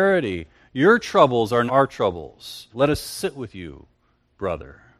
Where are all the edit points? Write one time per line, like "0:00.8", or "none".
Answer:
0:01.7
0:02.7